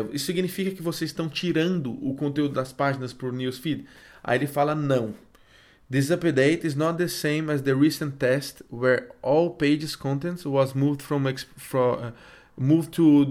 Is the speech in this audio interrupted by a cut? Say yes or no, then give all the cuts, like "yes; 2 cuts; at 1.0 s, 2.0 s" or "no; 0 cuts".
no; 0 cuts